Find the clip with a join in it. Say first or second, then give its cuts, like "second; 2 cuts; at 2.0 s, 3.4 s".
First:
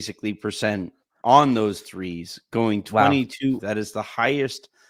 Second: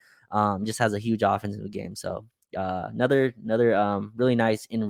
first; 1 cut; at 3.6 s